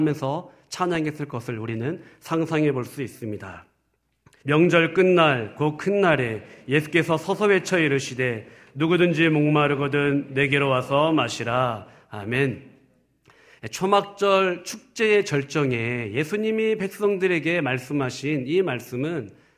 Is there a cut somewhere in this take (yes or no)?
yes